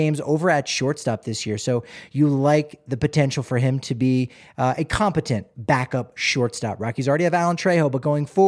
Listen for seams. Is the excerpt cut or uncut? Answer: uncut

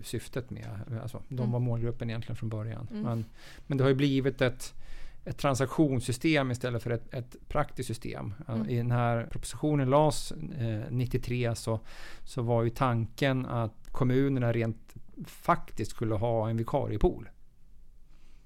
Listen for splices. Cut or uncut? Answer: cut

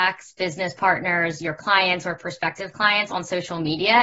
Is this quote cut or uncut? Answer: uncut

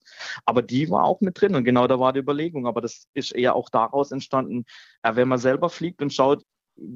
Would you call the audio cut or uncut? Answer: uncut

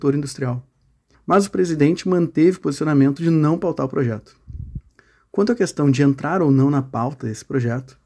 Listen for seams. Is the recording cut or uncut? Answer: cut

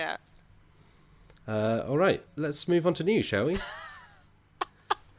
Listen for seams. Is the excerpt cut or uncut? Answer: cut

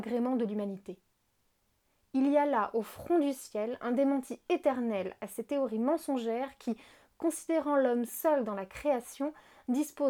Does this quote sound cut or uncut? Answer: uncut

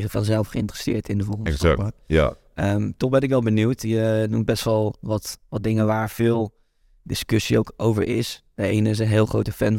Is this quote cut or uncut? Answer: uncut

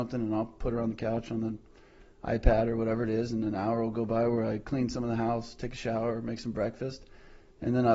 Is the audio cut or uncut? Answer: uncut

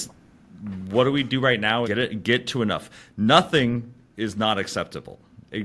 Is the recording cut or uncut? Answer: cut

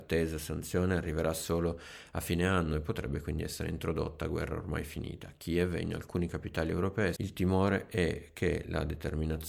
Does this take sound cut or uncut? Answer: cut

